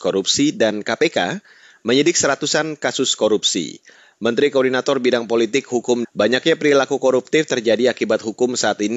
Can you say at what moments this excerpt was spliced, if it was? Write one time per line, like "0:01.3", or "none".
0:06.0